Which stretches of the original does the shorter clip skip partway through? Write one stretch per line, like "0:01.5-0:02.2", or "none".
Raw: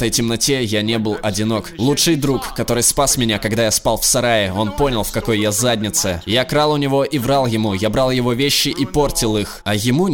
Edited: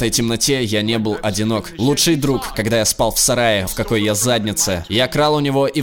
0:02.5-0:03.4
0:04.5-0:05.0